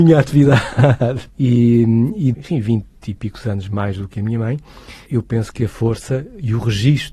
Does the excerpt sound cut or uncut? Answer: cut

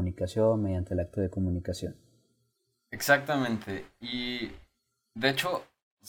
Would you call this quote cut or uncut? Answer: uncut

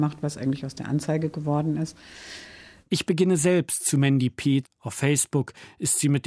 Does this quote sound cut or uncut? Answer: cut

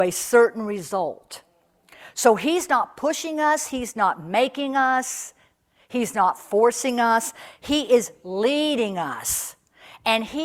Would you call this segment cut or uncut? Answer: uncut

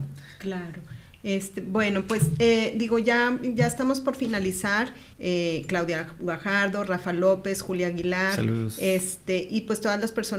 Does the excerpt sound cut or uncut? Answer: cut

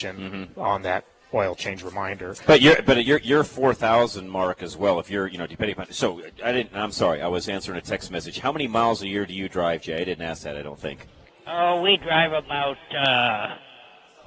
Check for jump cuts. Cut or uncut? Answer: uncut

